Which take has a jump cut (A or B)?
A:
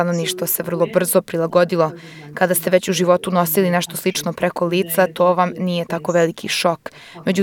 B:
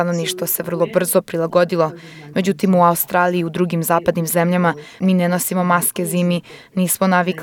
B